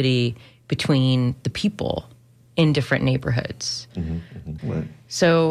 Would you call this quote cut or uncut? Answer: cut